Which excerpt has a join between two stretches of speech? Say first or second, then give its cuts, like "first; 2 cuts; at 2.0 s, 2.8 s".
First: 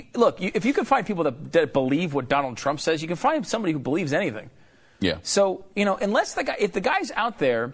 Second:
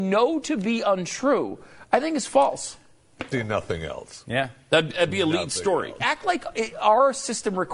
second; 2 cuts; at 3.3 s, 6.0 s